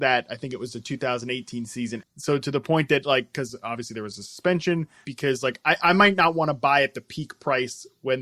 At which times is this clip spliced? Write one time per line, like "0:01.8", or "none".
0:02.0
0:05.0

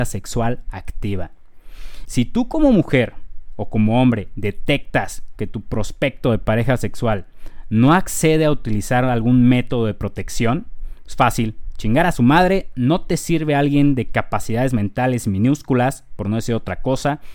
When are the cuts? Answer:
0:02.1

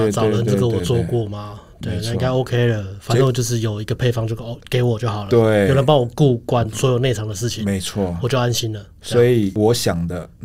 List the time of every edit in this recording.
none

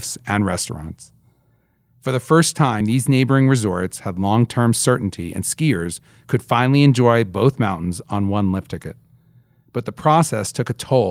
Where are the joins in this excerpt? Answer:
none

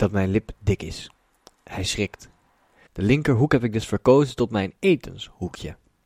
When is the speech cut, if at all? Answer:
0:02.9

